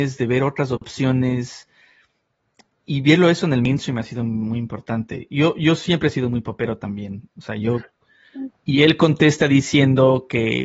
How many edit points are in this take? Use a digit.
2